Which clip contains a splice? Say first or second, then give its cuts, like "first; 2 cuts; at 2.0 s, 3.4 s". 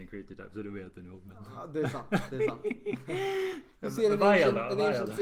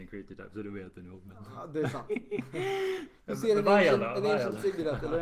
second; 1 cut; at 2.1 s